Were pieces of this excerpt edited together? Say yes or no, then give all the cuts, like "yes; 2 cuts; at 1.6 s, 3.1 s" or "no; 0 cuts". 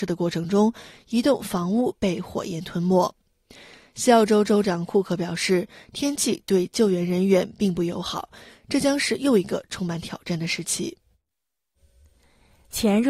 no; 0 cuts